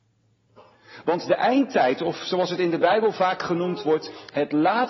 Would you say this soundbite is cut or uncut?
uncut